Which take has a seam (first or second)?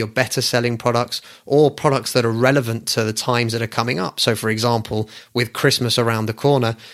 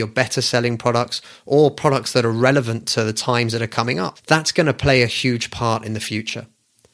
second